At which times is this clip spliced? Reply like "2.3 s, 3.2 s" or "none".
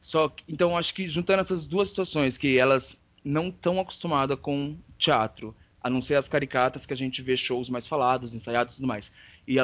none